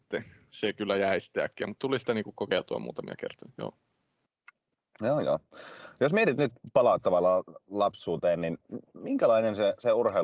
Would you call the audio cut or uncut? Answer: uncut